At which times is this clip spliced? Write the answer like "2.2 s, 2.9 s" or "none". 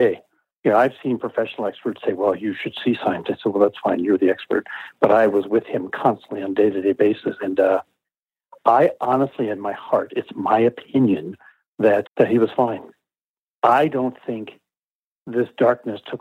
12.1 s

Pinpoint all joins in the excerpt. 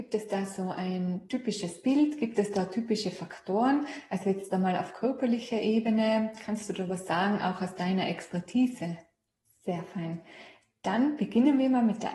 9.4 s

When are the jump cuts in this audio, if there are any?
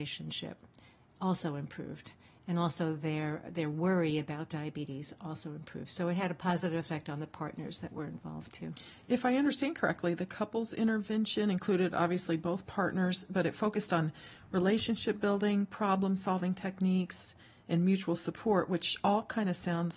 none

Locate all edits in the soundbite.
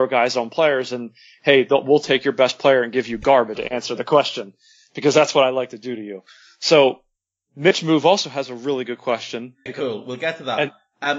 3.6 s, 9.7 s

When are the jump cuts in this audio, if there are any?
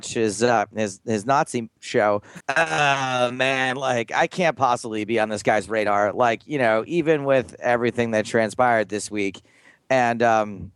2.4 s

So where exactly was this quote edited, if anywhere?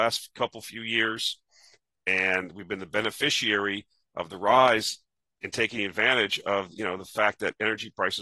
1.9 s

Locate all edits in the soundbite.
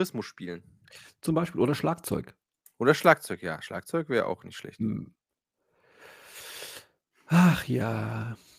none

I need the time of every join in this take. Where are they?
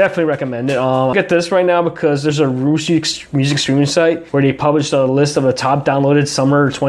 1.1 s, 4.3 s

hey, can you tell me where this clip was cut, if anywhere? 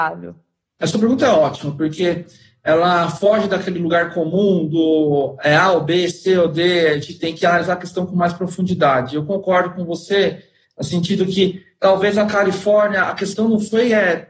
none

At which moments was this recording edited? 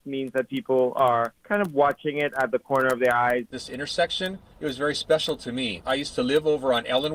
3.5 s

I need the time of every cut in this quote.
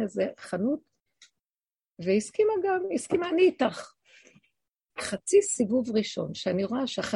5.0 s

